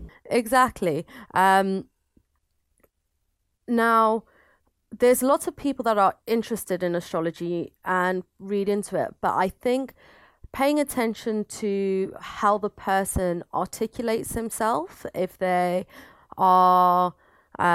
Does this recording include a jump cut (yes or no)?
no